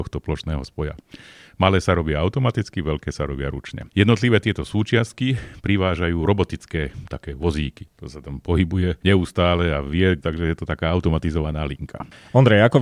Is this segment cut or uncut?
cut